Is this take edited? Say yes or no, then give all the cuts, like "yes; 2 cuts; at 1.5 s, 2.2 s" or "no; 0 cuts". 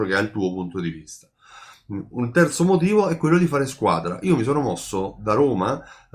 no; 0 cuts